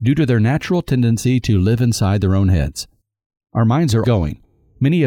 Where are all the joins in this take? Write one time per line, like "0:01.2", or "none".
0:04.0